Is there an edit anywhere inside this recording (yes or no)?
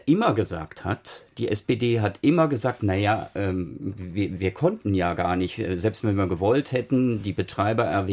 no